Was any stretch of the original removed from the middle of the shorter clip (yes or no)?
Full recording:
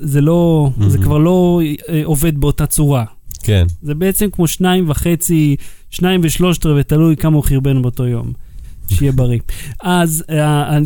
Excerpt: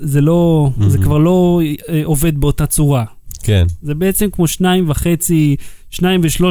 no